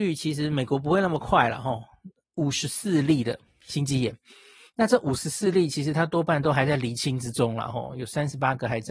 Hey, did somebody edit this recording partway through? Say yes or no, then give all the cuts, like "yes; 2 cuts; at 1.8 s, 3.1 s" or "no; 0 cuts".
yes; 1 cut; at 2.2 s